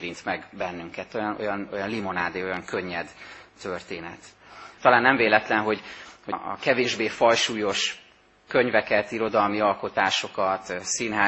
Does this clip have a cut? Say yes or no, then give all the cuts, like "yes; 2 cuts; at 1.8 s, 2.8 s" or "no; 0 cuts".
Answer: yes; 2 cuts; at 4.8 s, 6.3 s